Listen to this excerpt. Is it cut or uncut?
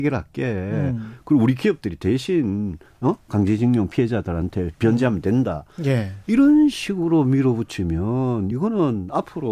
uncut